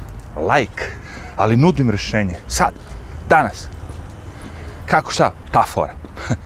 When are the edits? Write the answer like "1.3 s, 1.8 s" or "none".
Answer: 2.4 s, 5.4 s